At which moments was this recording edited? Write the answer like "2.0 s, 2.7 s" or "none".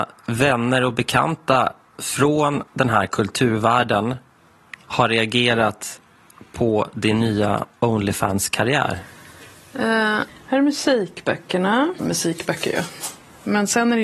2.7 s, 10.3 s, 12.0 s